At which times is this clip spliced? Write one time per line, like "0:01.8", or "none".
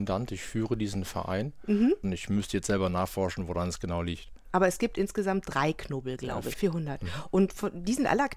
0:02.0
0:06.5